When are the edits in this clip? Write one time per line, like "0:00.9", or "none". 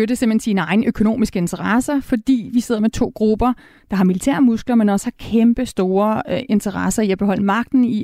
none